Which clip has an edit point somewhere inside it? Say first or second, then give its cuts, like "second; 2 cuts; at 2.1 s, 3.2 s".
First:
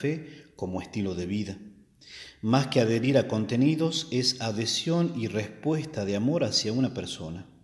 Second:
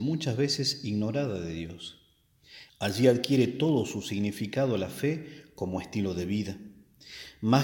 second; 1 cut; at 2.7 s